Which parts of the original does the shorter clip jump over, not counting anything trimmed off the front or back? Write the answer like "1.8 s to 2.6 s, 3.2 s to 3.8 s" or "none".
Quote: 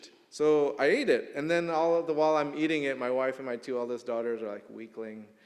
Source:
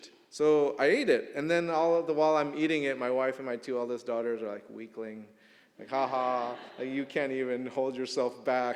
none